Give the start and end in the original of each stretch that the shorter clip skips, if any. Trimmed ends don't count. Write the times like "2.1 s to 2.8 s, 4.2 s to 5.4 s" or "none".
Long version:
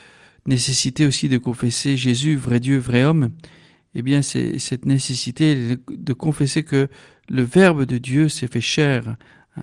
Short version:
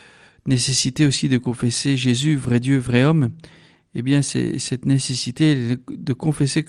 none